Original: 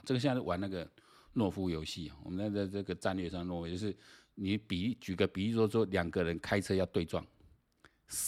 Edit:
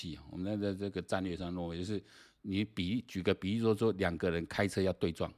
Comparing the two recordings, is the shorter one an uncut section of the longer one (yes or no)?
yes